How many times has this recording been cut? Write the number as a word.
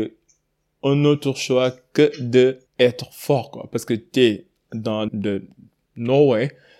two